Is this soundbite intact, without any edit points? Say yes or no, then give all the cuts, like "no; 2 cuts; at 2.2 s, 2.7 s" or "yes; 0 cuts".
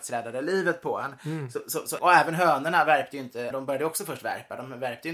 no; 2 cuts; at 2.0 s, 3.5 s